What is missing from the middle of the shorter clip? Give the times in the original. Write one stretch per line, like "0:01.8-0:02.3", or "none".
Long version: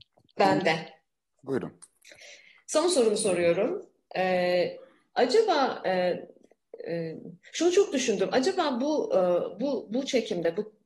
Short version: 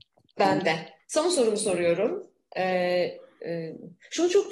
0:01.0-0:02.6
0:05.0-0:06.8